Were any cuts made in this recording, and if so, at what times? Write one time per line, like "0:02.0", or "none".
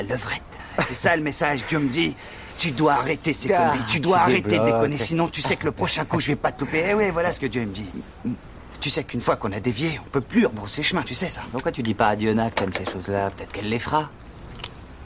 none